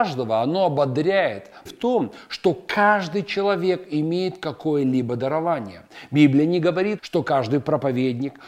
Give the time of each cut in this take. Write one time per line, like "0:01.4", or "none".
0:01.7
0:07.0